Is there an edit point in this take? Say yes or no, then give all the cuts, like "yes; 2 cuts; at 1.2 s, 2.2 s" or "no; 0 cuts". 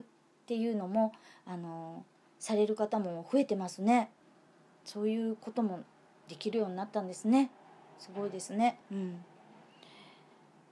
yes; 1 cut; at 8.8 s